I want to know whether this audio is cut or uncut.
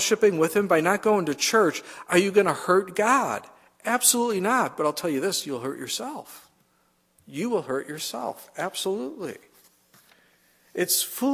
uncut